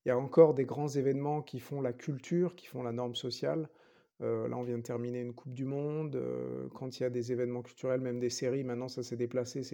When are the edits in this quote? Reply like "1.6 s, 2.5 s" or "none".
none